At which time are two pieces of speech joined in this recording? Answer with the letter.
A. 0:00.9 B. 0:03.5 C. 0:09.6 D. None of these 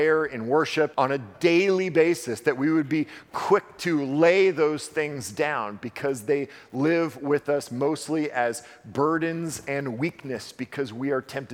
A